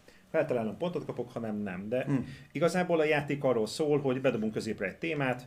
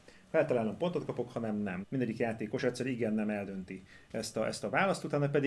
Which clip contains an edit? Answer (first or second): second